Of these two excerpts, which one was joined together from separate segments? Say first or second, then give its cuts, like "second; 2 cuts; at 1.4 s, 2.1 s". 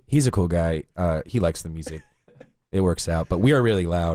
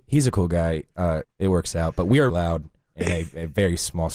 second; 2 cuts; at 1.2 s, 2.3 s